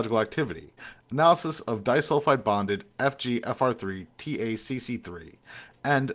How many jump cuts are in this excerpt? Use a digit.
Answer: 1